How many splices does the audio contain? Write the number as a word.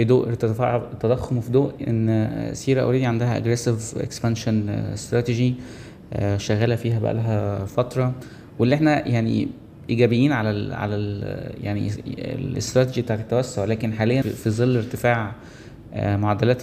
one